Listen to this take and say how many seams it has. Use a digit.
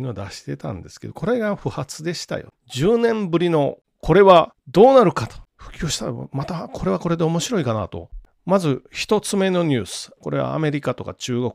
1